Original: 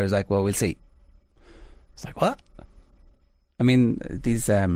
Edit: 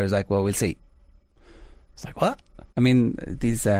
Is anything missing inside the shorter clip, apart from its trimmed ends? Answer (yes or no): yes